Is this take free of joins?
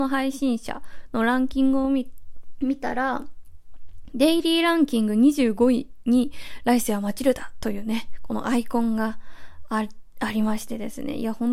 yes; 0 cuts

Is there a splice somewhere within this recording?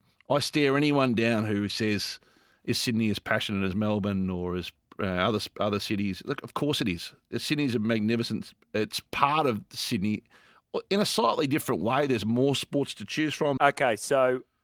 yes; 1 cut; at 13.6 s

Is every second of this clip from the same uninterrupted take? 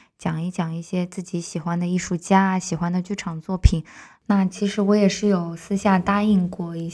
yes; 0 cuts

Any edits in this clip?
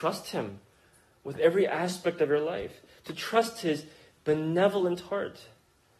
no; 0 cuts

